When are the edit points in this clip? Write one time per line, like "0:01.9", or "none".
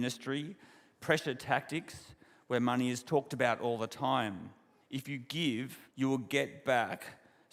0:04.8
0:05.9